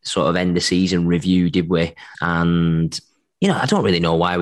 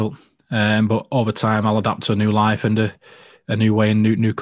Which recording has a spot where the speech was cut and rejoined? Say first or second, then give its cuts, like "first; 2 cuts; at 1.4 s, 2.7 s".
first; 1 cut; at 2.1 s